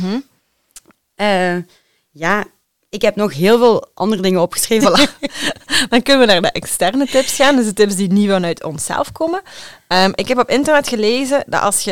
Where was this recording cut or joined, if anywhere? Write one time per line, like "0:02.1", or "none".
0:04.8